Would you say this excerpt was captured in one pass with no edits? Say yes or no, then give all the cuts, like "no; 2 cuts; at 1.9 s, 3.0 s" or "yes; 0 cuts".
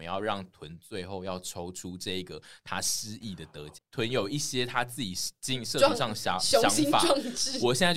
no; 1 cut; at 3.8 s